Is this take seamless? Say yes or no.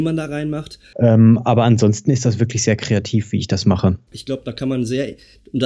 no